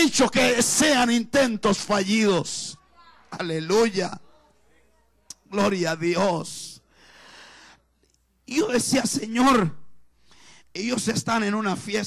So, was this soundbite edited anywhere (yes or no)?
no